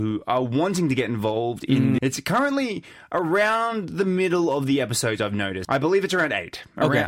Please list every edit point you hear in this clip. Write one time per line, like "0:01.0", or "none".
0:02.0
0:05.6